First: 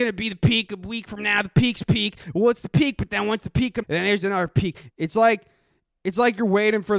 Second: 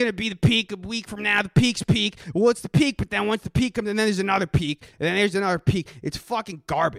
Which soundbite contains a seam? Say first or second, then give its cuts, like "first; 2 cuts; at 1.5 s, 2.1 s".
first; 2 cuts; at 3.8 s, 4.9 s